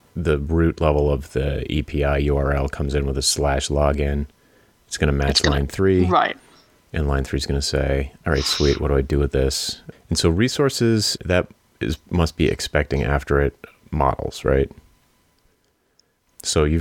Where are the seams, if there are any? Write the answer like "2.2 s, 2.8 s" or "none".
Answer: 9.9 s, 11.2 s